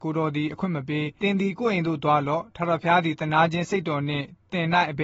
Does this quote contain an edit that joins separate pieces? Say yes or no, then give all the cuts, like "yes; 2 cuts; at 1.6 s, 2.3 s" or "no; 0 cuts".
yes; 1 cut; at 1.2 s